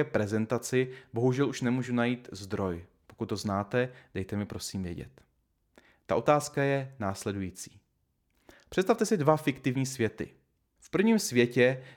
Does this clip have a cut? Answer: yes; 1 cut; at 10.8 s

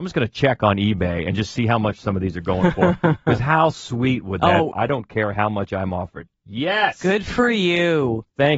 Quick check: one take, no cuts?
no; 1 cut; at 4.7 s

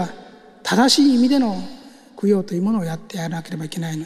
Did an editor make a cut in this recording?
no; 0 cuts

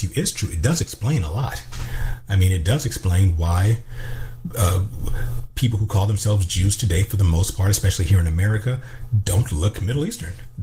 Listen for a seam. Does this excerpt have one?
no; 0 cuts

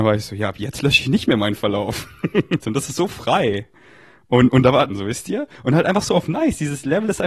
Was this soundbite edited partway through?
yes; 2 cuts; at 2.6 s, 4.9 s

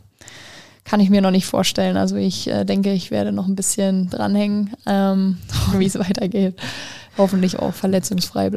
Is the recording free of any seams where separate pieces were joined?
no; 1 cut; at 5.7 s

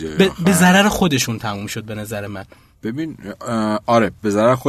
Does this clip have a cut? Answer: no; 0 cuts

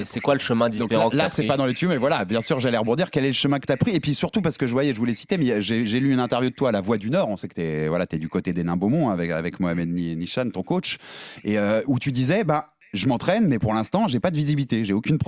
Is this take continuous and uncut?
yes; 0 cuts

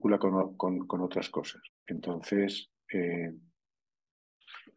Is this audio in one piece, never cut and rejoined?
no; 1 cut; at 1.7 s

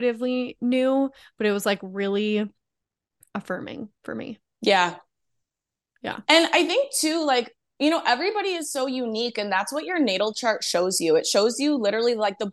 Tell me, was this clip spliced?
no; 0 cuts

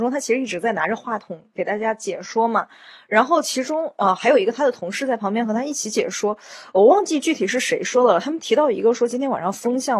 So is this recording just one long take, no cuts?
yes; 0 cuts

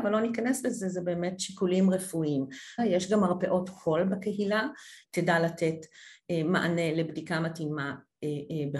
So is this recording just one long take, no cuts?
no; 2 cuts; at 2.8 s, 5.0 s

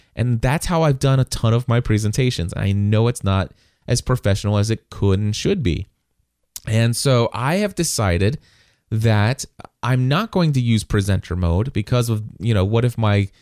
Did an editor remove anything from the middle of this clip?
no; 0 cuts

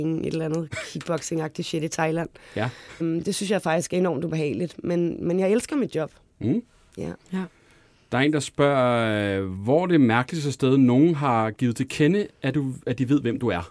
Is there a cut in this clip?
yes; 1 cut; at 3.0 s

